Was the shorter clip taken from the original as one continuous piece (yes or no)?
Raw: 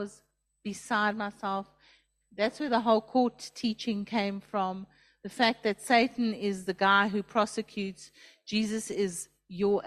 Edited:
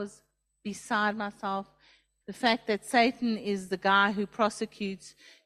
no